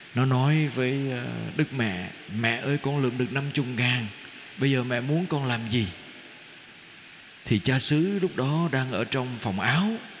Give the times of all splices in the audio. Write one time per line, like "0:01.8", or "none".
none